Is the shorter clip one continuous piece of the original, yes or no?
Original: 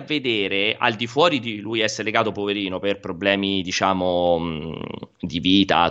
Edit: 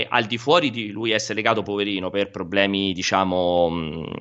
yes